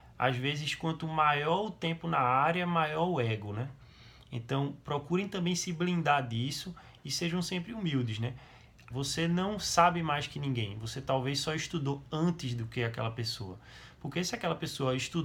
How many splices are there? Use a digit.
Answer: 1